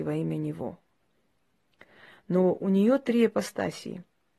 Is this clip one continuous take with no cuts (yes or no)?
yes